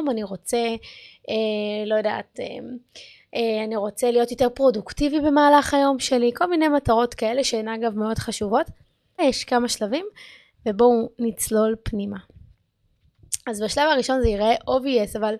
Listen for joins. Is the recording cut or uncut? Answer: cut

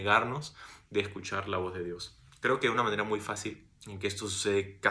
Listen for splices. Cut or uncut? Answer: cut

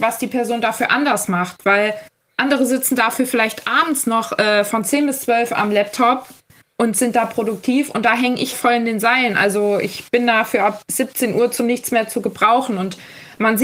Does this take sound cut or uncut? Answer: cut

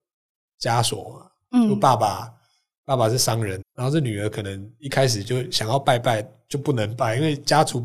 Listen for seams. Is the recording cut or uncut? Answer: cut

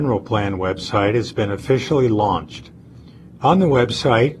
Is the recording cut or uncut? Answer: uncut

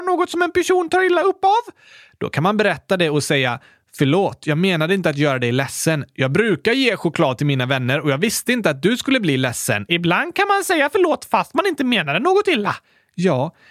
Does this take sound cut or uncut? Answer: uncut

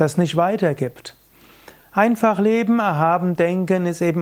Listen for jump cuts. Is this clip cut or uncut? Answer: uncut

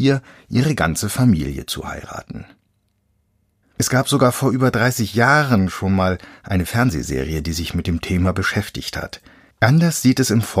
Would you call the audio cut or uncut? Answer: cut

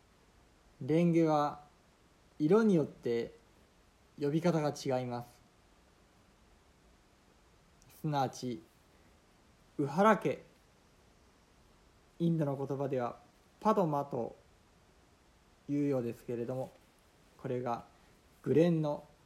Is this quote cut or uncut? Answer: cut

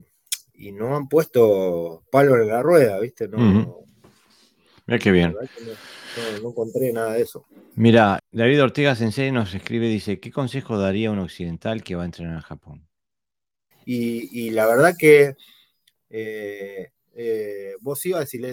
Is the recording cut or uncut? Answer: cut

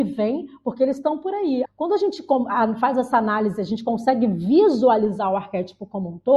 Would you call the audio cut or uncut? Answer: cut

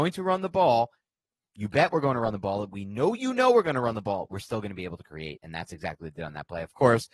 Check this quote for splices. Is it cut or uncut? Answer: uncut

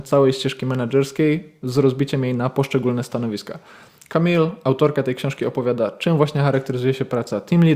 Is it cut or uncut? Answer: uncut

